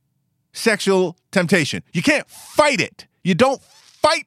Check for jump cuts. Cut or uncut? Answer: uncut